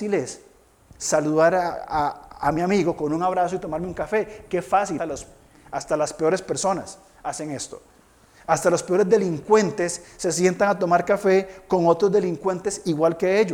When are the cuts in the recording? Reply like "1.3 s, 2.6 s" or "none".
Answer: 5.0 s